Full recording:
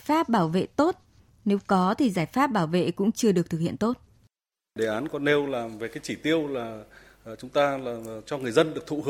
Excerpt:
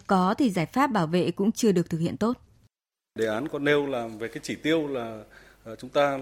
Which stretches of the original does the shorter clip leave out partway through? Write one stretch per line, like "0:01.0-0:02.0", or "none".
none